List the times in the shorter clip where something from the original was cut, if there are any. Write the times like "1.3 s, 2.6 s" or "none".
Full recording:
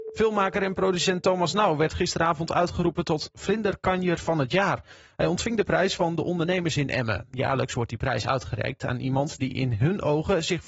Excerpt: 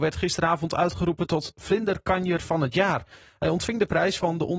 none